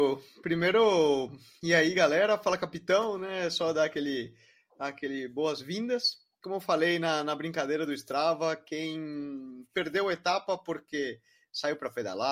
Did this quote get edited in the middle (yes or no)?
no